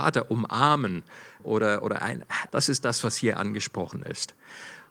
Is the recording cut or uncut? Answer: cut